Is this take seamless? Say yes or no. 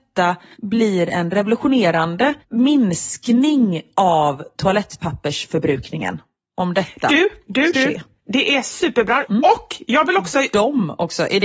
no